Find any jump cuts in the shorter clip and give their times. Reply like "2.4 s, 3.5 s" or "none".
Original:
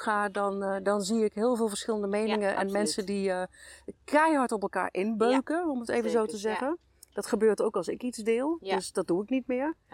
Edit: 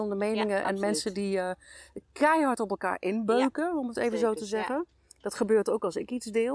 none